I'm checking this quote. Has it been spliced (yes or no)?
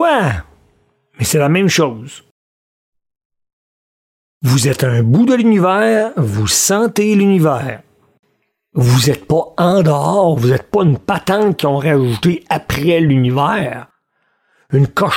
no